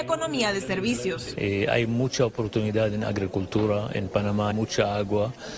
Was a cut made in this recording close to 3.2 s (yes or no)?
no